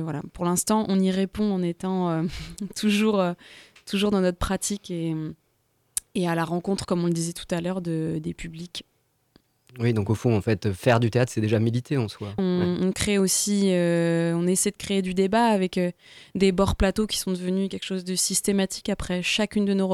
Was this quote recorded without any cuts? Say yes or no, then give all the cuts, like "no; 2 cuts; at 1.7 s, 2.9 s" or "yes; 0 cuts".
no; 1 cut; at 12.4 s